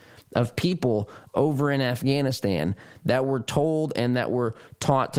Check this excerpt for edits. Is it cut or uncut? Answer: uncut